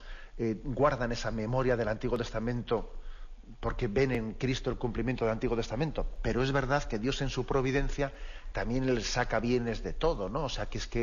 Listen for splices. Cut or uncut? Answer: uncut